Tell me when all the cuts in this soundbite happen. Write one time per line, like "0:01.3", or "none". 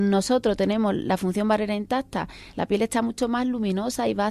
0:02.5